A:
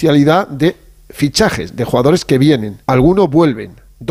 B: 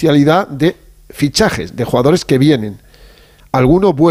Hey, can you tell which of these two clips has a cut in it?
A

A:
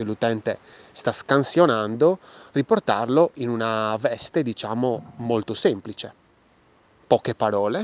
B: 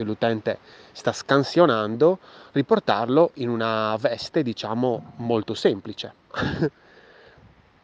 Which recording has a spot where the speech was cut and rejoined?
B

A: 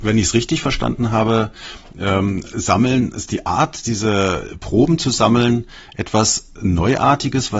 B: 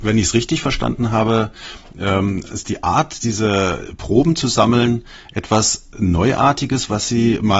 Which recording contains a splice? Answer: B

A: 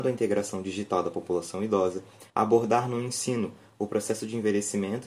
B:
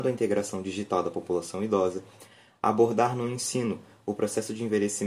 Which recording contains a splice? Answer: A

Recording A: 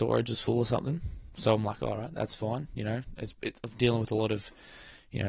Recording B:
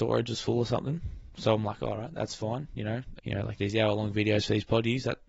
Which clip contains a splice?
B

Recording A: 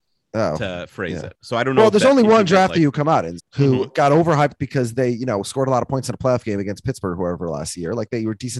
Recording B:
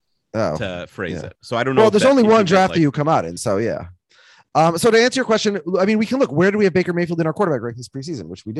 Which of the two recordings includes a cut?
A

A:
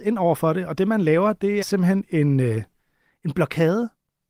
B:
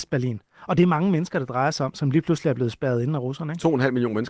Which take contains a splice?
A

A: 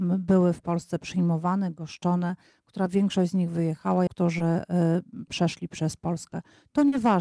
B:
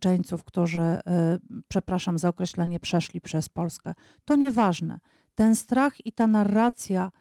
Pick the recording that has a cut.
A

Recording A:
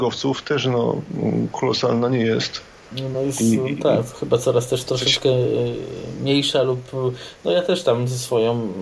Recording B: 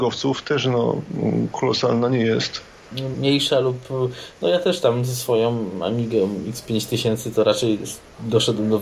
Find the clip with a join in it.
B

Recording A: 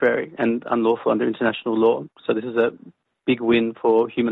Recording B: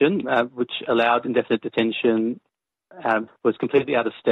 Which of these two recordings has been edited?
B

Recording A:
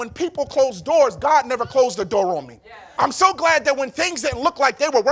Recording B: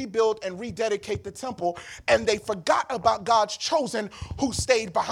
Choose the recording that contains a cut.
A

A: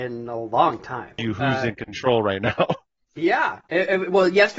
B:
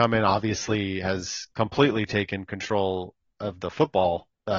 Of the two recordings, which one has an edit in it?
A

